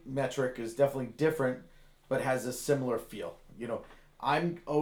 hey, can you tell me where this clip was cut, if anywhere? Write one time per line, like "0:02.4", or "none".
none

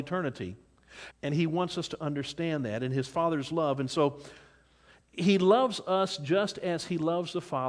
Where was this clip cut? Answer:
0:01.1

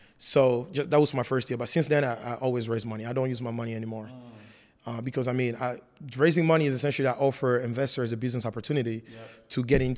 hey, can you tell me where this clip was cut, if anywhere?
none

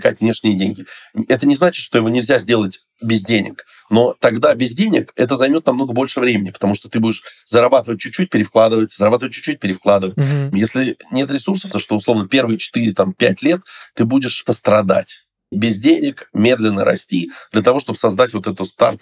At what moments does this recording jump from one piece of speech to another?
0:10.5
0:11.7
0:14.5

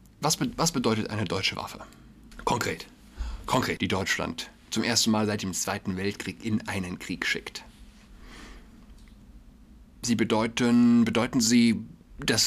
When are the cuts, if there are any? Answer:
0:03.8

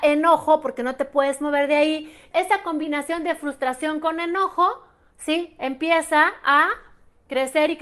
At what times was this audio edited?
0:02.3

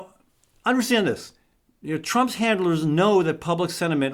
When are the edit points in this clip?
none

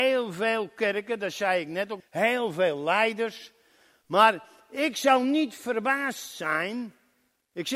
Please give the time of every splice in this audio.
0:02.0

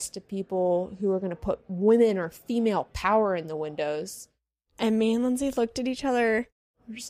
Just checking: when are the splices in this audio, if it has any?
none

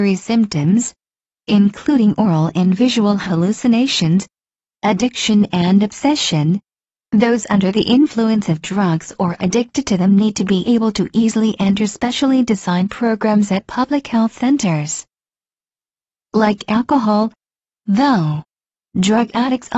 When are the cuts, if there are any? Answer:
0:04.7

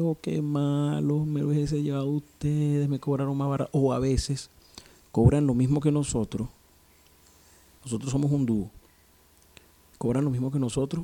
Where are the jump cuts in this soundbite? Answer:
none

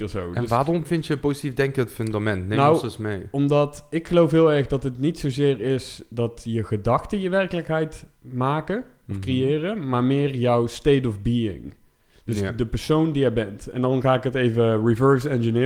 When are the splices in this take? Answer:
none

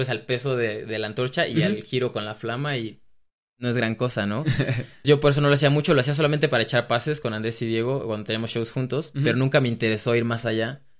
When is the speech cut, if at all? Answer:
0:05.0

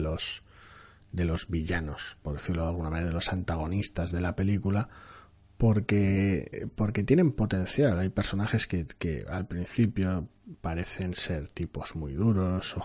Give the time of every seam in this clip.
none

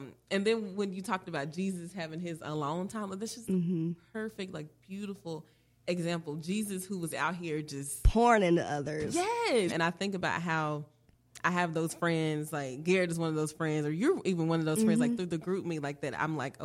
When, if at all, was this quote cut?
0:09.7

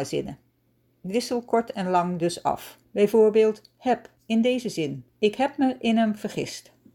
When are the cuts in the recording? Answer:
0:02.8
0:05.1

